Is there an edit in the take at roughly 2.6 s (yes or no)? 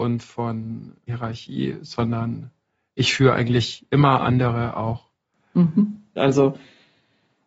no